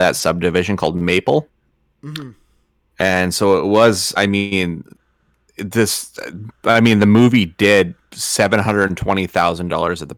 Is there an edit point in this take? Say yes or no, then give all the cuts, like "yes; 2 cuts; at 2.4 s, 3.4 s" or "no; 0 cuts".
yes; 1 cut; at 4.2 s